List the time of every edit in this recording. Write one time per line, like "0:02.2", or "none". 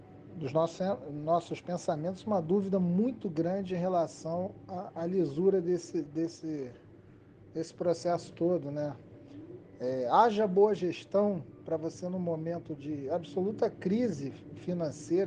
none